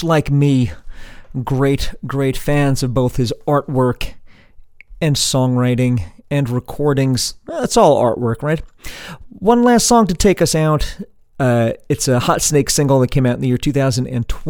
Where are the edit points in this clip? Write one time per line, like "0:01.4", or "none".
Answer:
0:11.3